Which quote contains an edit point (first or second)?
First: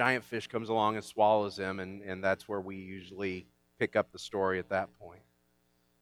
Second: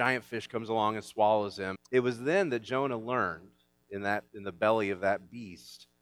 second